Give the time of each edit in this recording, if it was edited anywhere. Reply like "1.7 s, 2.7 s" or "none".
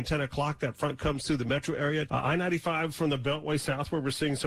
2.1 s